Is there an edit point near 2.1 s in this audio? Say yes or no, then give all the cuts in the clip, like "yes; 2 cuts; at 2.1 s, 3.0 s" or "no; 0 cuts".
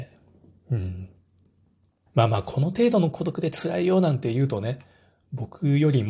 yes; 1 cut; at 2.1 s